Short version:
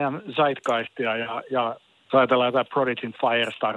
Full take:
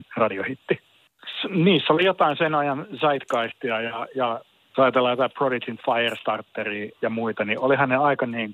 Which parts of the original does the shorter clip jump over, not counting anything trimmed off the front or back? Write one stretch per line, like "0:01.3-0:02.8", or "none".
none